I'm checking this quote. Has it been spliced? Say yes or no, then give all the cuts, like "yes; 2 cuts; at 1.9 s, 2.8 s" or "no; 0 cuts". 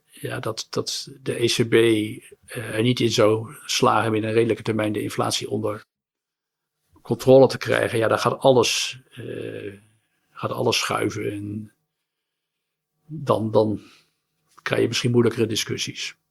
no; 0 cuts